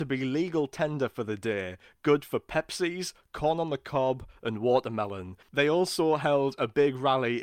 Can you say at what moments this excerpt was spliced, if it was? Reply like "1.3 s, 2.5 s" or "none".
5.4 s